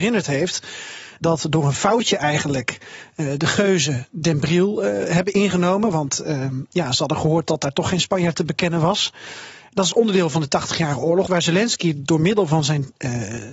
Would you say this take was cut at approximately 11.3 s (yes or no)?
yes